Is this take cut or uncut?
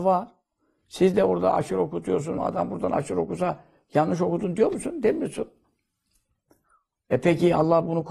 cut